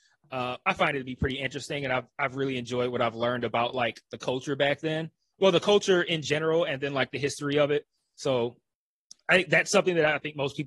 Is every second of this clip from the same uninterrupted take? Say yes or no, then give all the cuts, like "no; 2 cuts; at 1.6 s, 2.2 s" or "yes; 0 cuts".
yes; 0 cuts